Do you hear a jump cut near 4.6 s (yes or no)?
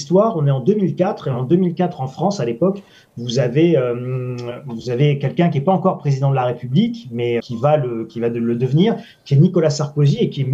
no